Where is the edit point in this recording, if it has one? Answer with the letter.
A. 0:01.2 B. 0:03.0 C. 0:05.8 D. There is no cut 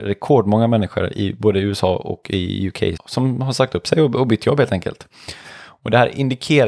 B